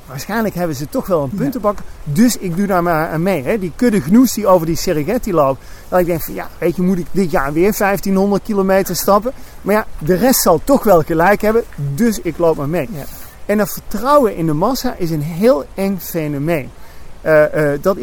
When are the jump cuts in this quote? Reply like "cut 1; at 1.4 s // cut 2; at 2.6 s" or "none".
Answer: none